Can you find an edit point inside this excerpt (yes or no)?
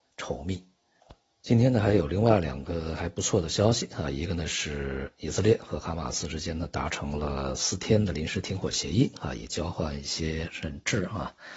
no